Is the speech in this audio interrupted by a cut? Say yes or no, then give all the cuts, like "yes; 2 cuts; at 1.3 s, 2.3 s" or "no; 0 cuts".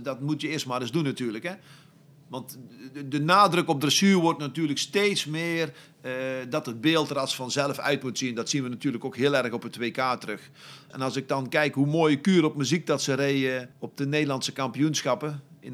yes; 2 cuts; at 10.9 s, 13.7 s